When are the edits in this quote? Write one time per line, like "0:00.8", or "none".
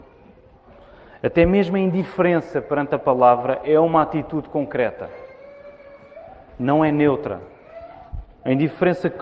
none